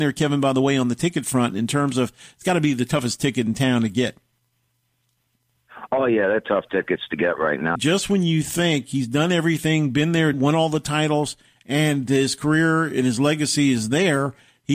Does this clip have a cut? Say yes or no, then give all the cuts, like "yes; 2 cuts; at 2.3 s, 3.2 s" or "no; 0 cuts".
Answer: yes; 2 cuts; at 7.8 s, 10.3 s